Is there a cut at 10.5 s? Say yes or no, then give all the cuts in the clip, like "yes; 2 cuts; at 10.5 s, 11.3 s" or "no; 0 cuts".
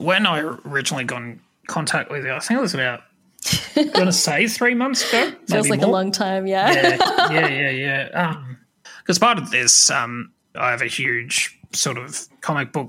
yes; 1 cut; at 10.5 s